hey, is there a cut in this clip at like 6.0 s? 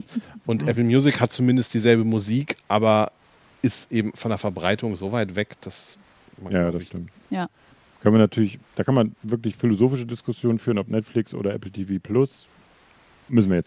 no; 0 cuts

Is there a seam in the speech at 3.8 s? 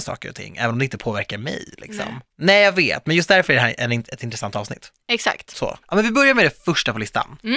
no; 2 cuts; at 2.3 s, 5.8 s

